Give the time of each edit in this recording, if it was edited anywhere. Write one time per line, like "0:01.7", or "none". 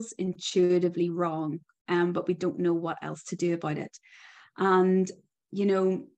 none